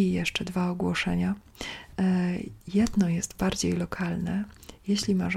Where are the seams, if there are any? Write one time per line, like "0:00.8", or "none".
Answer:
0:02.6